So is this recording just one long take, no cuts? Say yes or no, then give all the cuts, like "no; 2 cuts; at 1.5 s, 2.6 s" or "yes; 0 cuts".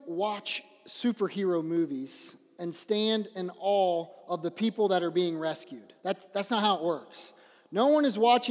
no; 1 cut; at 6.0 s